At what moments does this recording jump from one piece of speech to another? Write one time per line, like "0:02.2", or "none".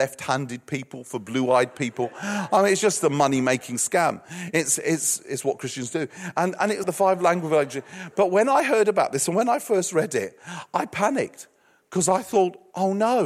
0:06.8

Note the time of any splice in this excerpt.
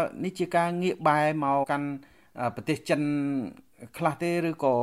0:01.6

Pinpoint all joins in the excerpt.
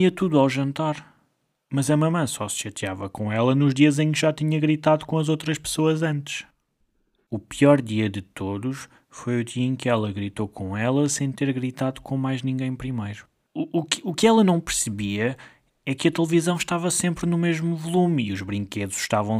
0:13.5

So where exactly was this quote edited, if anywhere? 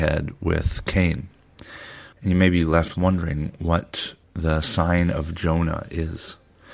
0:02.1
0:04.2

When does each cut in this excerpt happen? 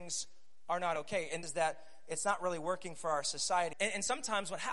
0:01.4
0:03.7

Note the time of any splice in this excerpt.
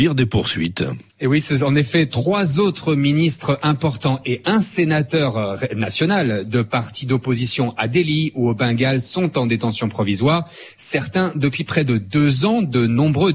0:01.1

